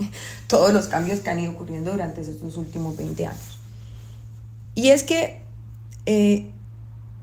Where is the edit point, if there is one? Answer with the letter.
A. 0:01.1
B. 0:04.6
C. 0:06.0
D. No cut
D